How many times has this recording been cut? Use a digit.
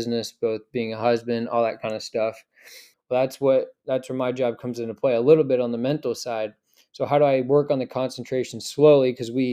1